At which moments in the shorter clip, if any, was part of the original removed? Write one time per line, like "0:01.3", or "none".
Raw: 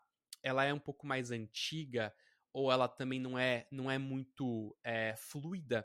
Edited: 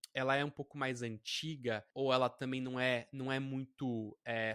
0:01.9